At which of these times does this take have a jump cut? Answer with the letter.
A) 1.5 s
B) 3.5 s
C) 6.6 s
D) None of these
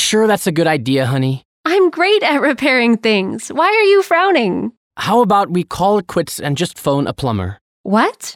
D